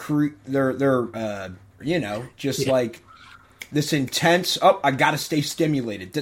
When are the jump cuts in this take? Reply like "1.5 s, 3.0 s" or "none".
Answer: 1.8 s